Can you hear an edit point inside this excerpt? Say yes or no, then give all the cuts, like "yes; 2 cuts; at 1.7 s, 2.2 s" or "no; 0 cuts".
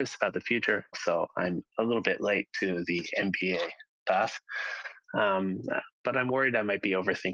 yes; 1 cut; at 0.9 s